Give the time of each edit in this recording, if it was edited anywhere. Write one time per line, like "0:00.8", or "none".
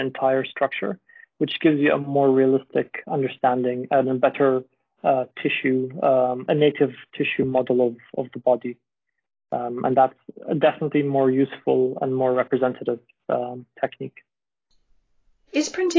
0:06.5